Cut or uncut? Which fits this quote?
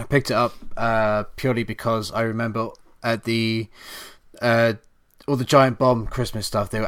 uncut